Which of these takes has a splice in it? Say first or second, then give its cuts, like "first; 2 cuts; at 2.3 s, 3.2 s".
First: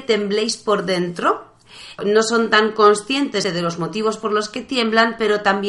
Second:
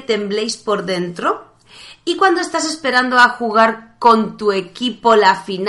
first; 2 cuts; at 2.0 s, 3.4 s